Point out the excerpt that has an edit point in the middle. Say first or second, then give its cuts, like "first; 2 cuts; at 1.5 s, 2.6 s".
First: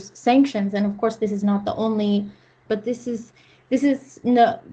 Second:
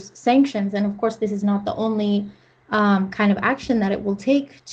first; 1 cut; at 2.7 s